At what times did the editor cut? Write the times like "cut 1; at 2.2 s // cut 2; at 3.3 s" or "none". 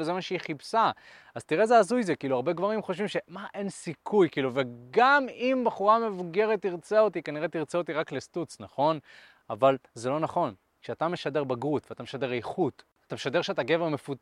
none